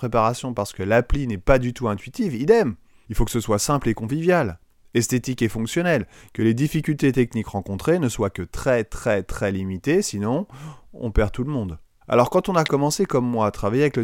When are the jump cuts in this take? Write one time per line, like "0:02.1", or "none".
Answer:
0:03.0
0:12.0